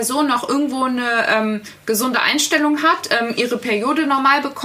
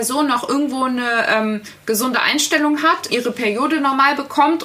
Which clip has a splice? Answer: second; 1 cut; at 3.1 s

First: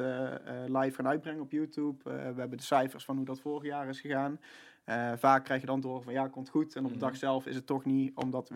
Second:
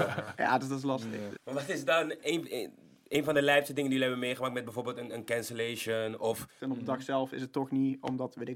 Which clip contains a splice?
second; 2 cuts; at 1.4 s, 6.6 s

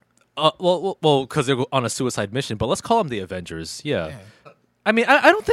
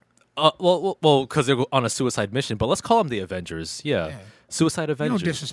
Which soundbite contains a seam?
first; 1 cut; at 4.5 s

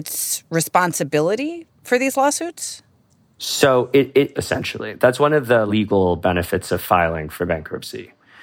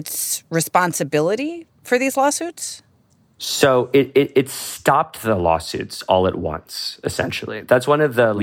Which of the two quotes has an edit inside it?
first; 1 cut; at 4.3 s

